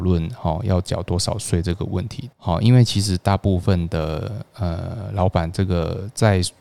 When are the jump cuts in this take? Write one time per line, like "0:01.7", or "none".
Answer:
0:02.3